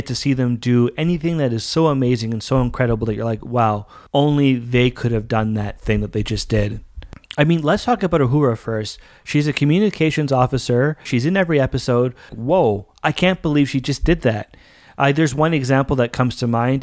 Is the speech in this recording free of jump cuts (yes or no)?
no